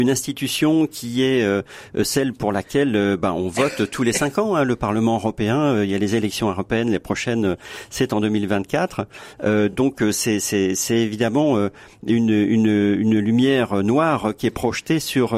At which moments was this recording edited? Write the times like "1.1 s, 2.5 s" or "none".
none